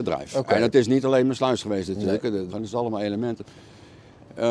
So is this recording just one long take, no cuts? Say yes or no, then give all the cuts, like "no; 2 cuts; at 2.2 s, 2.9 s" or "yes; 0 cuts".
no; 1 cut; at 2.5 s